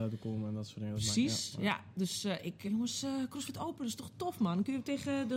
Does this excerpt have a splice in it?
yes; 1 cut; at 2.7 s

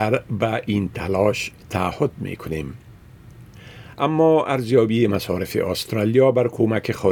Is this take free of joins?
yes; 0 cuts

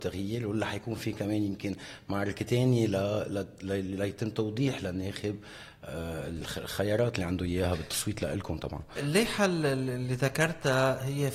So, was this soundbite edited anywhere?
no; 0 cuts

